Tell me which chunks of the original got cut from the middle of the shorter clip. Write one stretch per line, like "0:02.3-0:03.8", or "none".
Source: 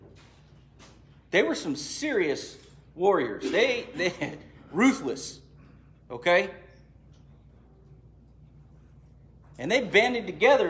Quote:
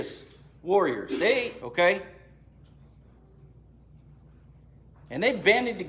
0:03.9-0:06.1